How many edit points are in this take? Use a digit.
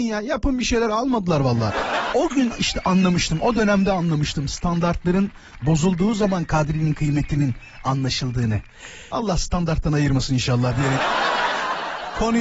2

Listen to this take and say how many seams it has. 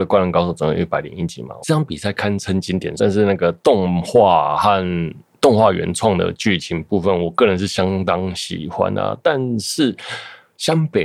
2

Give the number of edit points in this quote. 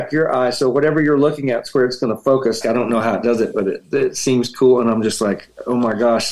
1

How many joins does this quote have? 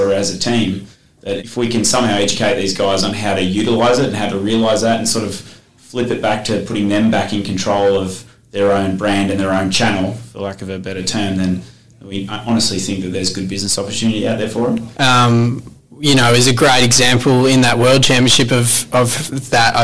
2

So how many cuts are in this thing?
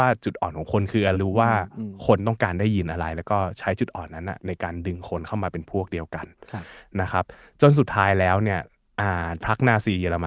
1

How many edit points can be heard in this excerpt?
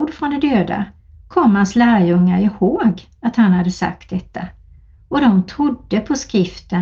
0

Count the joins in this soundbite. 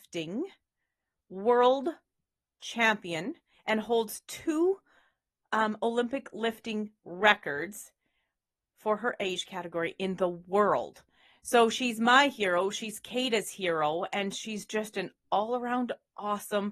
0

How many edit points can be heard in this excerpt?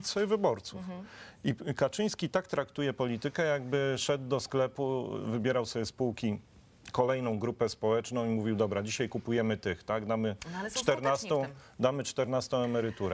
0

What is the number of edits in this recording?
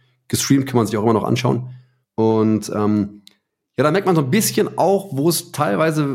1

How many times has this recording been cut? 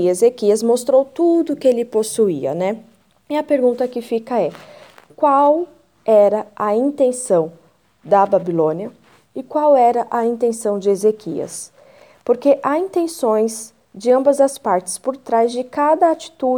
0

